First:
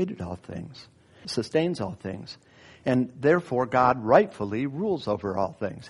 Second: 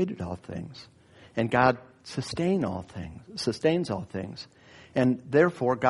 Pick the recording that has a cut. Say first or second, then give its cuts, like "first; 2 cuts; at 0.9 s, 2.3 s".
first; 1 cut; at 1.2 s